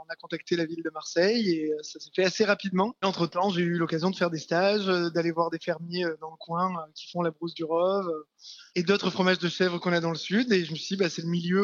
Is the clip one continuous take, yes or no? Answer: yes